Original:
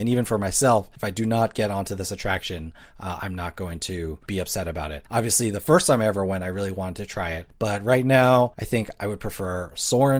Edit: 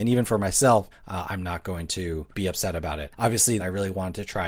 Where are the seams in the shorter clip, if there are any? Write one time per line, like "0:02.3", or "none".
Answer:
0:00.9
0:03.6